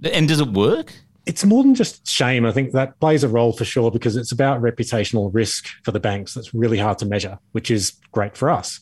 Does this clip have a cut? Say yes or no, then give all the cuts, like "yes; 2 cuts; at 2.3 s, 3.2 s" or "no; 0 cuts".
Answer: no; 0 cuts